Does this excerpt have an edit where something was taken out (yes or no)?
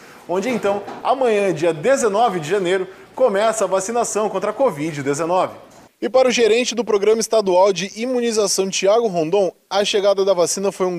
no